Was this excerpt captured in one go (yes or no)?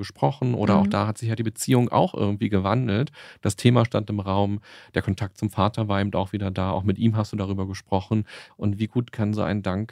no